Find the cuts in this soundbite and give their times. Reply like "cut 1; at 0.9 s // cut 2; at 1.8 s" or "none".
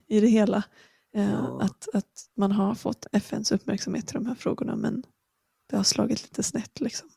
cut 1; at 2.3 s